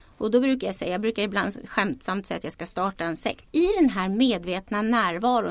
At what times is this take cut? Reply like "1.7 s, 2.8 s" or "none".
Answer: 3.4 s